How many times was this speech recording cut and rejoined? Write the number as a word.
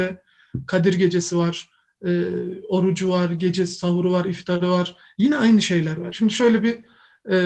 one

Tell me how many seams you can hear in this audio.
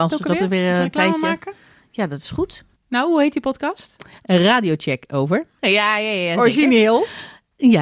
one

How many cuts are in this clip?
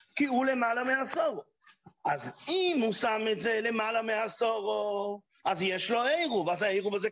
two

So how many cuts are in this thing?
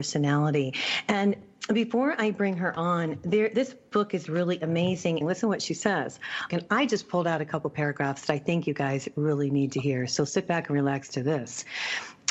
two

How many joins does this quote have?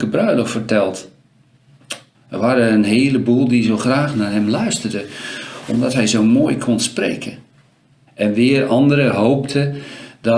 two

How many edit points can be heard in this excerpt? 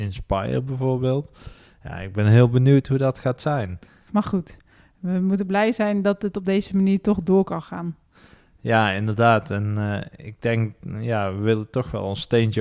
one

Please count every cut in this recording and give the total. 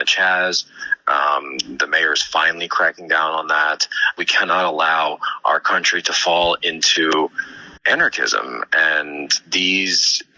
two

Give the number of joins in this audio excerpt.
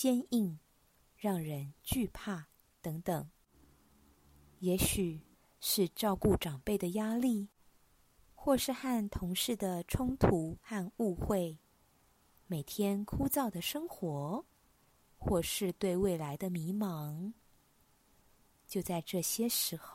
zero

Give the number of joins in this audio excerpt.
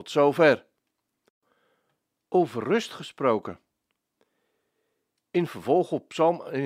zero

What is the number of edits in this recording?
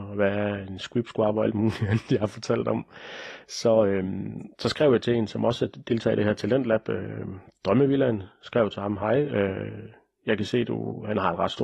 zero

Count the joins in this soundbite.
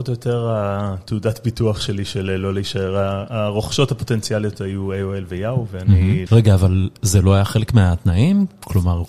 one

